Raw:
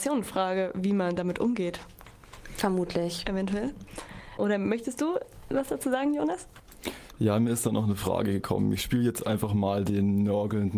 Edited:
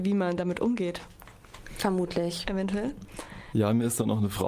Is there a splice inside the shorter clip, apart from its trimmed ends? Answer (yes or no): yes